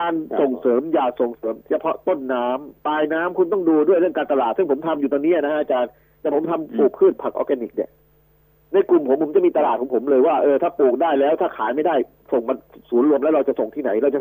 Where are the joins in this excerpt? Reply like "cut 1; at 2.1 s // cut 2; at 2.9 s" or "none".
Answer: none